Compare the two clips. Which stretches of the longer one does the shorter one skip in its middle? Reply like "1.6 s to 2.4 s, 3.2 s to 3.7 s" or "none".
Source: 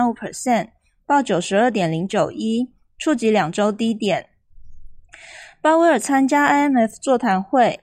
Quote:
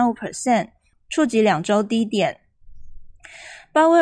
0.9 s to 2.8 s